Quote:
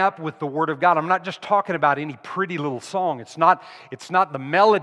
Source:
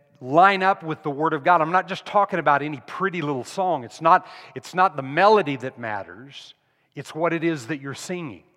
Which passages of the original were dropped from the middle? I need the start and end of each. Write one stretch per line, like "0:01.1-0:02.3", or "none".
none